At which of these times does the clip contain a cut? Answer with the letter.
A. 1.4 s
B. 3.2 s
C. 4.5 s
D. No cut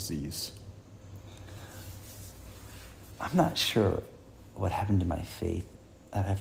D